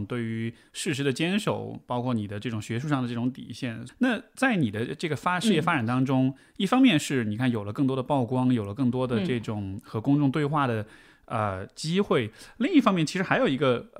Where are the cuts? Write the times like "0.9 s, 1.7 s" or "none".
3.9 s